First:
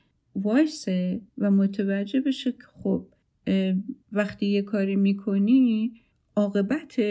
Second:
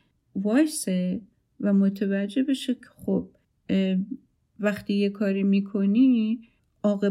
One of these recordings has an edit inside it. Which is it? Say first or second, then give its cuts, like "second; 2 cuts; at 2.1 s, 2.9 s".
first; 2 cuts; at 1.3 s, 4.0 s